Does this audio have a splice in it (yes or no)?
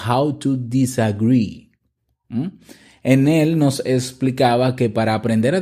no